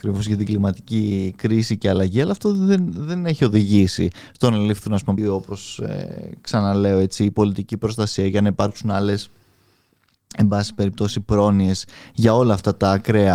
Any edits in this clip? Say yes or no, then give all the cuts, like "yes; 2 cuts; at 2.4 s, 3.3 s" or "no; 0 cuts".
yes; 1 cut; at 5.2 s